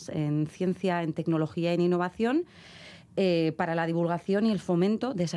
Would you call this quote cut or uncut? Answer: uncut